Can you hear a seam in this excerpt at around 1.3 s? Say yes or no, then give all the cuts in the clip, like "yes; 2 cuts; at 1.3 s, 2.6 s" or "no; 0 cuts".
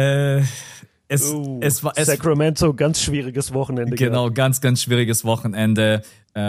no; 0 cuts